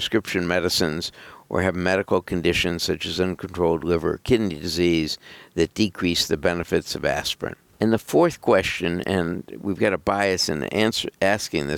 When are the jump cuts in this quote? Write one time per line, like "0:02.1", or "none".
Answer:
0:07.7